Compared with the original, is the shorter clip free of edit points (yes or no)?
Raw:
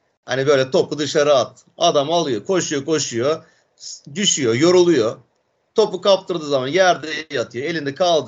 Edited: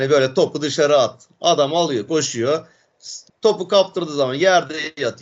no